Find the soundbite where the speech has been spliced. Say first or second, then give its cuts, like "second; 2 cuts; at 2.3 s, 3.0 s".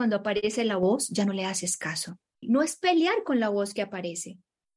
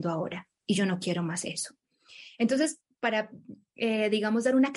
first; 1 cut; at 2.4 s